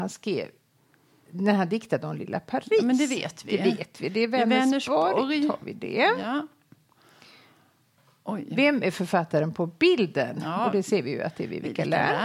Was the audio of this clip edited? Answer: no; 0 cuts

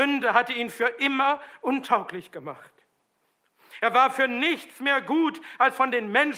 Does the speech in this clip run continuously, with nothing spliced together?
no; 1 cut; at 3.8 s

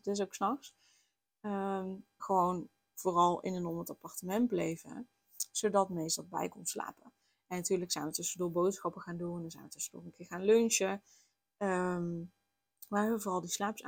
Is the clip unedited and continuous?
no; 1 cut; at 2.2 s

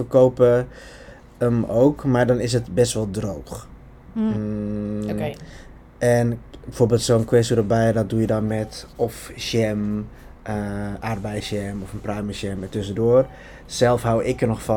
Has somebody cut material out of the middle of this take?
no; 0 cuts

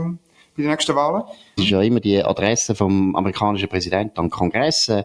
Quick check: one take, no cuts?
no; 1 cut; at 1.6 s

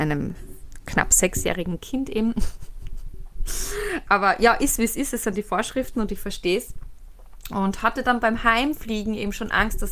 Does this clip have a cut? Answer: no; 0 cuts

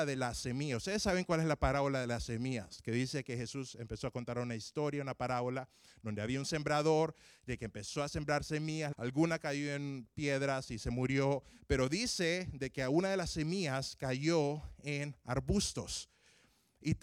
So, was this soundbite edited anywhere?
yes; 1 cut; at 8.9 s

